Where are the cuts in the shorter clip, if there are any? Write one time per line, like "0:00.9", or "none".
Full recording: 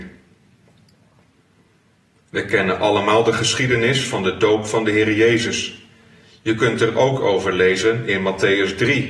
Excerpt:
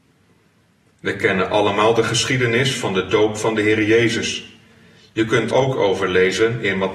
0:05.5